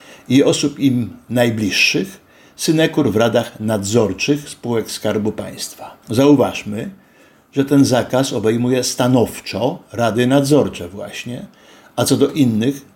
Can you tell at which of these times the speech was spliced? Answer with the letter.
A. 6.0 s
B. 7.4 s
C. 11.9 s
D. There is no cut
A